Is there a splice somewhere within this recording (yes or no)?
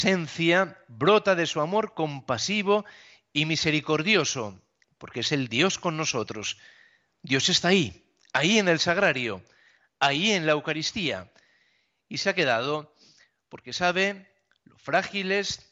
no